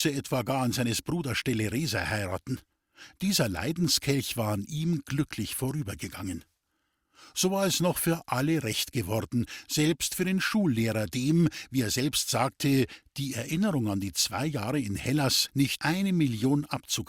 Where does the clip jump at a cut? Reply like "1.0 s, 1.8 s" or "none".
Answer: 15.8 s